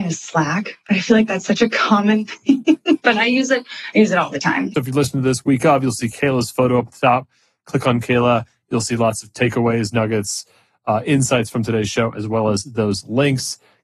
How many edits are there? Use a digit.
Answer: 1